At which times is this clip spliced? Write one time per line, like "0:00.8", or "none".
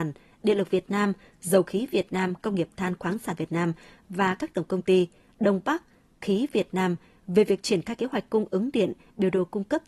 none